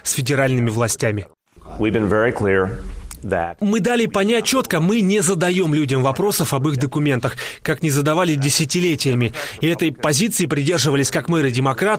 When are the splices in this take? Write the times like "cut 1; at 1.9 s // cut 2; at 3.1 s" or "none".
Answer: cut 1; at 4.4 s